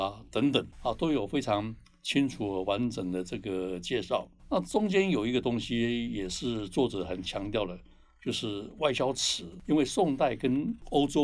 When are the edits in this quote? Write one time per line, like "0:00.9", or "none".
none

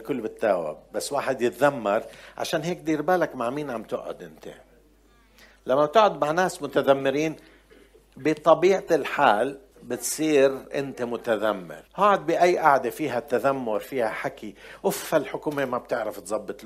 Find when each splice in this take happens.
0:09.7
0:11.9

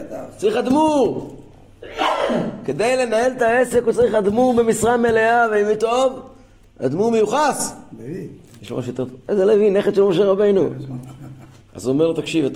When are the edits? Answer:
0:11.6

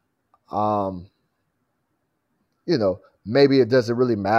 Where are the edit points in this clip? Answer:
none

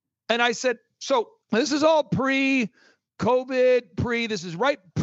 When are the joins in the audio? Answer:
0:01.4

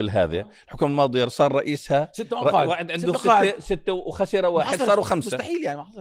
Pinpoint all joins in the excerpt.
none

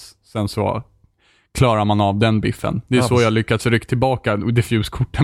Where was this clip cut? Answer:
none

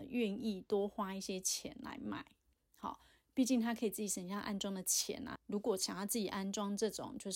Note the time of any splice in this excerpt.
0:05.4

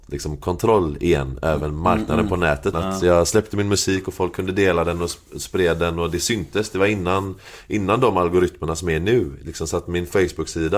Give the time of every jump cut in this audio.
0:02.7

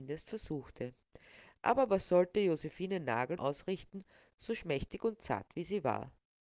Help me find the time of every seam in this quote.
0:03.4

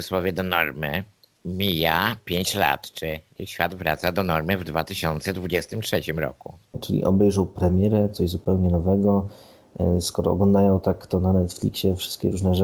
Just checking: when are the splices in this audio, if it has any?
0:06.7

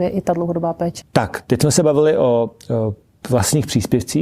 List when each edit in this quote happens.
0:01.0

